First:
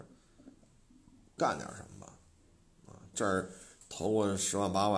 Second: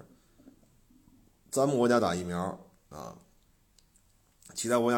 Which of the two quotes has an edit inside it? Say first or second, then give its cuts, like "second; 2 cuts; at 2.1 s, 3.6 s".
first; 2 cuts; at 1.4 s, 3.1 s